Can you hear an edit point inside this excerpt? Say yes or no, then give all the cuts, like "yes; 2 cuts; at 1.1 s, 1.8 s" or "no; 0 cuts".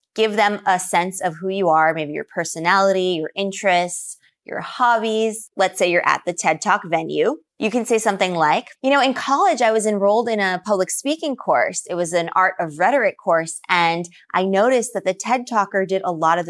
yes; 1 cut; at 8.8 s